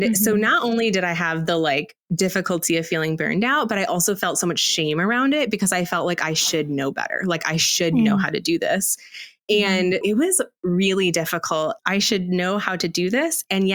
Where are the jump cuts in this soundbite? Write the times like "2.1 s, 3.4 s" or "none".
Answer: 10.0 s, 11.8 s

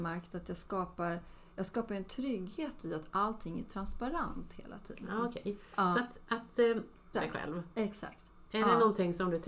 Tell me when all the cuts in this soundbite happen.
5.9 s, 7.1 s

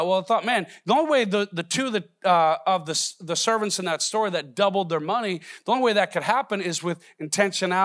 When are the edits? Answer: none

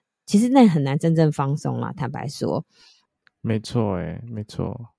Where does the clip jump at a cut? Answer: none

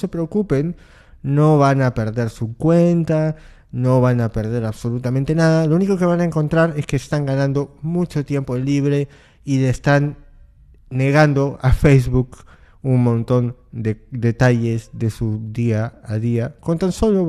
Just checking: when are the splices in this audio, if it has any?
none

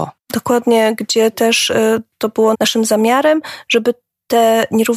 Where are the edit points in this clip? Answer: 2.5 s

